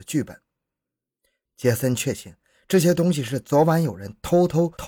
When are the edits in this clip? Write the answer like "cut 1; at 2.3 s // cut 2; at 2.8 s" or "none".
cut 1; at 1.5 s